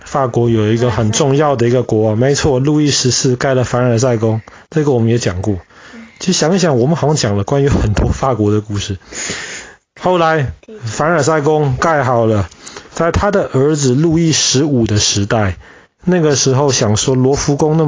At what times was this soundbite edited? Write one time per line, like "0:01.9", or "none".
0:12.9
0:16.0